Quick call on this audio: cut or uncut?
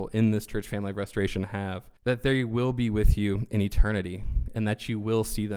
cut